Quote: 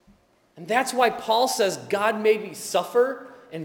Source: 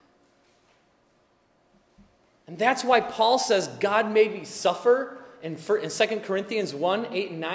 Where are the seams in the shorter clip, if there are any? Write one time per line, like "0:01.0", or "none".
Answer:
none

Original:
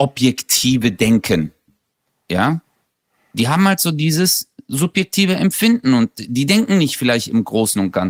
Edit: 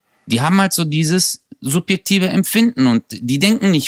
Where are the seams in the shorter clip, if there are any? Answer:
none

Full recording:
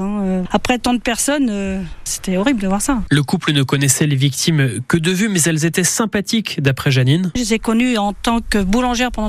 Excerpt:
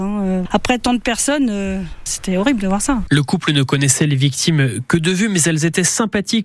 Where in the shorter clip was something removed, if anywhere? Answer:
none

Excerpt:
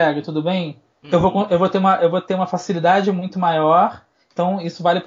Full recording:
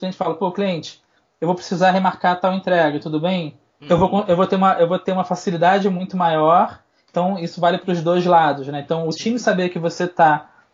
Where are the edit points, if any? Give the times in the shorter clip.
none

